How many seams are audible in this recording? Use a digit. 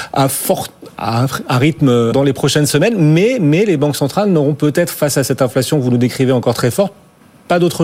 1